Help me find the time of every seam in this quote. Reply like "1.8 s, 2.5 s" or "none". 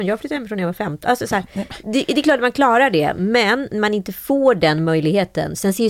none